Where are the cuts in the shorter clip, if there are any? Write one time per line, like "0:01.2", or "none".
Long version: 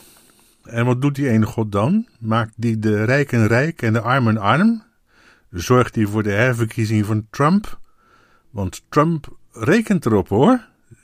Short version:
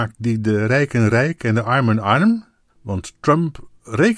0:02.7